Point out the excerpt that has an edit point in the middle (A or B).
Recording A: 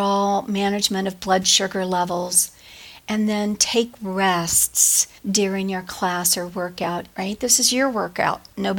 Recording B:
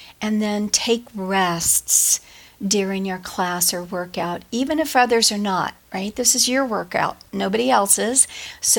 A